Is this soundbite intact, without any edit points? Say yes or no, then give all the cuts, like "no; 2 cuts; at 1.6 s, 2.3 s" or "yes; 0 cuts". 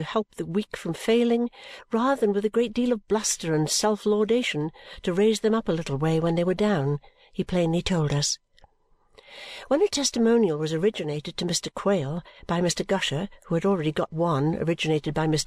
yes; 0 cuts